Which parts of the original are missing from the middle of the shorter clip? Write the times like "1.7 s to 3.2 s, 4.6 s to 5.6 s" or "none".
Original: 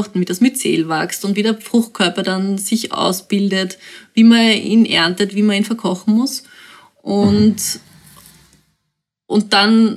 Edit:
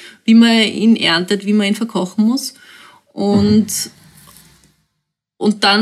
none